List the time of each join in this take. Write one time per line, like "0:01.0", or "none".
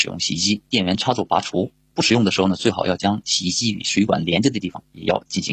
none